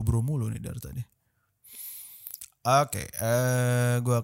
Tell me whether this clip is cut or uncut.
uncut